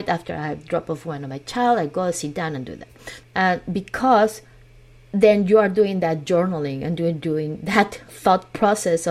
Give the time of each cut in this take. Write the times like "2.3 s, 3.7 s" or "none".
3.2 s, 8.1 s